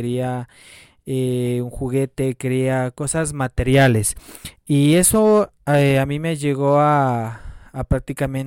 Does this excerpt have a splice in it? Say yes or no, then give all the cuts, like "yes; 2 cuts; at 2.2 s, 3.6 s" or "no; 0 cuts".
no; 0 cuts